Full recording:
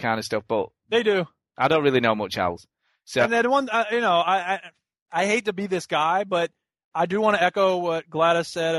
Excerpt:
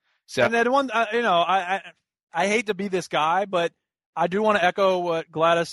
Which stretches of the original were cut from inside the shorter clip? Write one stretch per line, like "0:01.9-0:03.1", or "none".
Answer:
none